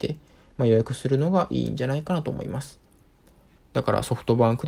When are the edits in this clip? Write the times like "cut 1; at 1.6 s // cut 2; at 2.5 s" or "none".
cut 1; at 3.6 s